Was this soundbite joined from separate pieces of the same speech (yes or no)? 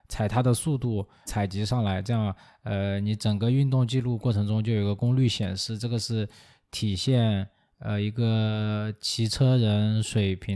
yes